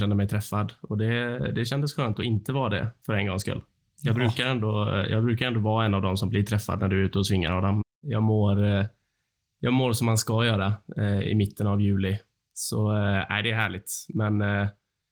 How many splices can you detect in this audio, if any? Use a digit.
1